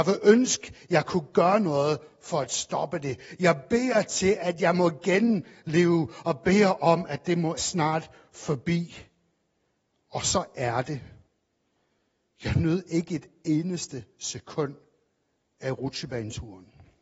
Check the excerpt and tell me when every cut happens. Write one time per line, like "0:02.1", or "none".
0:07.6